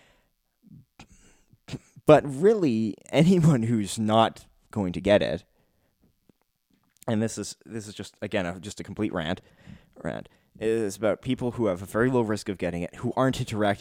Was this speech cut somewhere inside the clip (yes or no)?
no